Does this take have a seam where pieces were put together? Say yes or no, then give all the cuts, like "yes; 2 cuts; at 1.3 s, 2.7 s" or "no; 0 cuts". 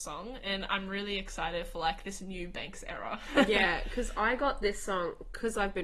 no; 0 cuts